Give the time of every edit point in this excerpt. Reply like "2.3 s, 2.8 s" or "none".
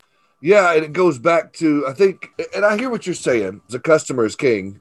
3.7 s